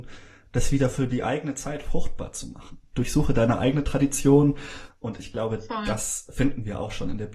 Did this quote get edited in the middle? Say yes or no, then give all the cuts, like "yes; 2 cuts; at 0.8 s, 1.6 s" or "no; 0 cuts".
yes; 2 cuts; at 2.9 s, 4.9 s